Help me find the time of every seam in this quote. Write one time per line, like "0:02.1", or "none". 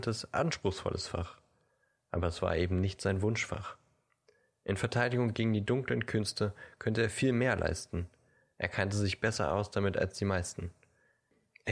none

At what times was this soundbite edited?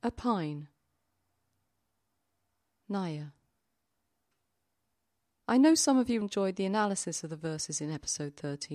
0:06.2

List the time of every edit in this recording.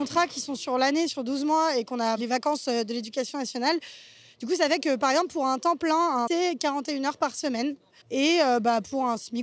0:06.3
0:08.0

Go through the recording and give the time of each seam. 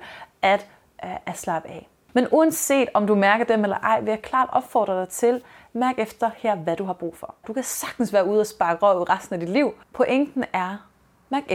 0:07.4

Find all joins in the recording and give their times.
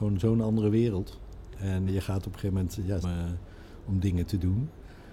0:01.9
0:03.0

